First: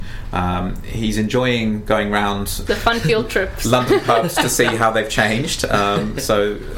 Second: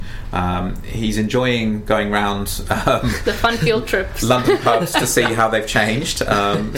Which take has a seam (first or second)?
first